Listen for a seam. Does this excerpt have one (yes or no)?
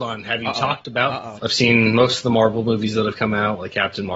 yes